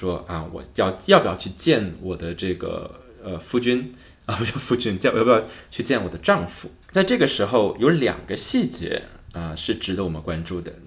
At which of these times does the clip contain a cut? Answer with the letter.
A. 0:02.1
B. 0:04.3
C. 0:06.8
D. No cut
C